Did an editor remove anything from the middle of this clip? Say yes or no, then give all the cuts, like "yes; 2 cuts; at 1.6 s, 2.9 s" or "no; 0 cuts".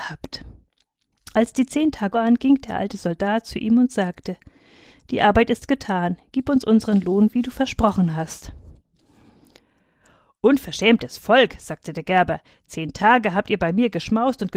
yes; 1 cut; at 2.1 s